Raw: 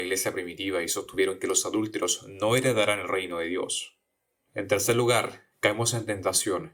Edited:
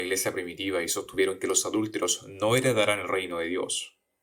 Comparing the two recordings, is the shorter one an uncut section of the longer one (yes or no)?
yes